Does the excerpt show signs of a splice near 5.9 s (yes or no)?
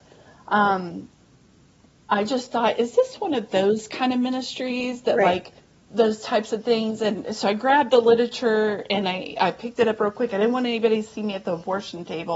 yes